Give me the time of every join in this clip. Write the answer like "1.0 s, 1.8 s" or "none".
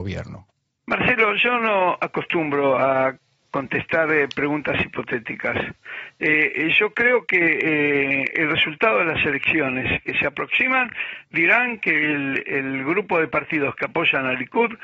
12.4 s

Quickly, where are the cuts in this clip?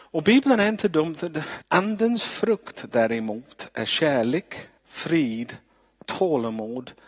1.6 s, 4.8 s

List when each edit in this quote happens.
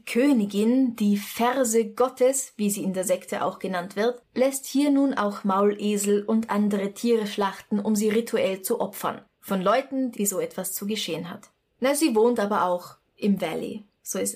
10.1 s, 11.7 s

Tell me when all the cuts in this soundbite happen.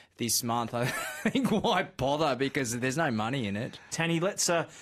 3.9 s

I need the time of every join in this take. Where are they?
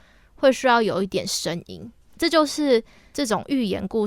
2.2 s

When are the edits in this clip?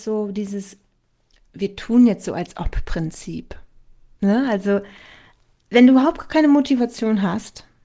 none

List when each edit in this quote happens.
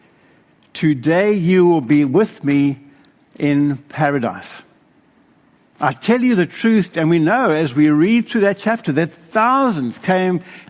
6.9 s

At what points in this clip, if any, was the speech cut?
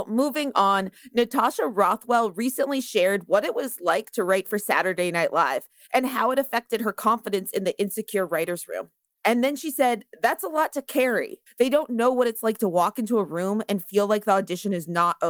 9.2 s, 11.5 s

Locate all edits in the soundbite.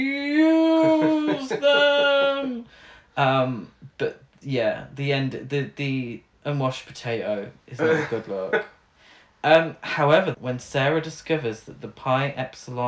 10.3 s

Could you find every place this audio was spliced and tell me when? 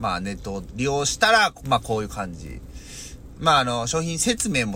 3.4 s

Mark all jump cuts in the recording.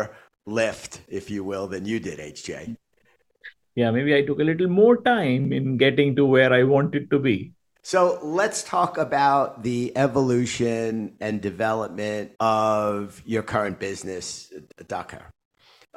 7.8 s, 12.3 s

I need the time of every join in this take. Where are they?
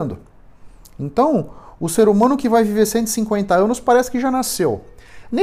none

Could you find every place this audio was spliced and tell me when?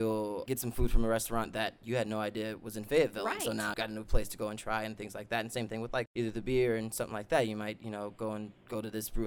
3.7 s

